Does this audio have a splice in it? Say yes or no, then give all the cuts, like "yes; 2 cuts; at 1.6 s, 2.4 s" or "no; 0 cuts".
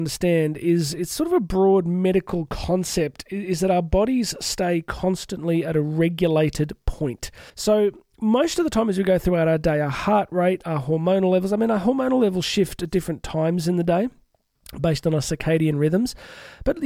yes; 1 cut; at 7.5 s